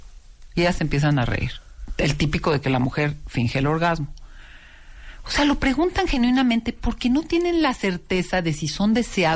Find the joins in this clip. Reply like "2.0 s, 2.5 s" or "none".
none